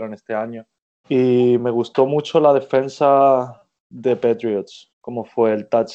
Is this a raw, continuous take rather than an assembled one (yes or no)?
no